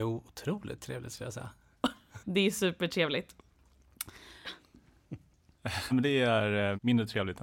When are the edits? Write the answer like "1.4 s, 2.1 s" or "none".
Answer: 2.2 s, 4.4 s, 5.9 s